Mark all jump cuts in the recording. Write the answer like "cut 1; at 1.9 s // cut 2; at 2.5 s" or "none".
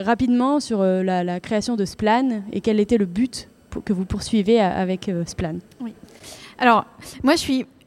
none